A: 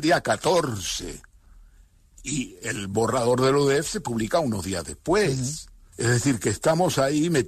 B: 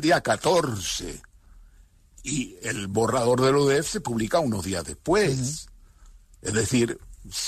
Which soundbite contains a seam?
A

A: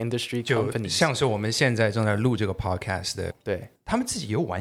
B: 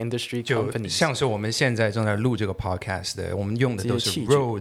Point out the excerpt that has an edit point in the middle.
A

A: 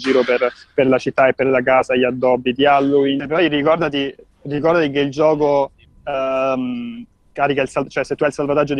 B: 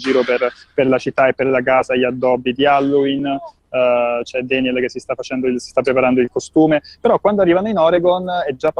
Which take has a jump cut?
A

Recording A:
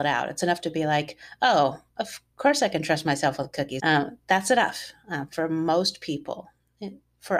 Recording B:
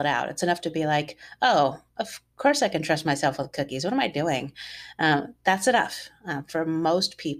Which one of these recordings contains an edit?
A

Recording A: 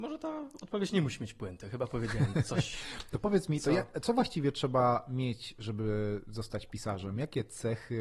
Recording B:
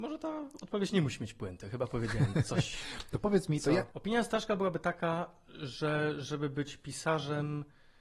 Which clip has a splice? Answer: B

